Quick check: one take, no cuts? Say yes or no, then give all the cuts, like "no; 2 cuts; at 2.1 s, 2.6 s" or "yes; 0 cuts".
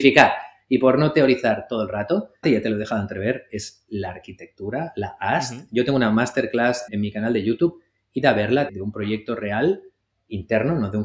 no; 3 cuts; at 2.4 s, 6.9 s, 8.7 s